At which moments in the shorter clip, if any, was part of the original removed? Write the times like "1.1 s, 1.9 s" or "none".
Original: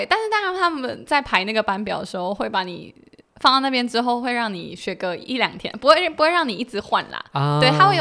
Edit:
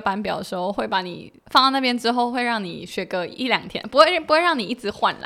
1.4 s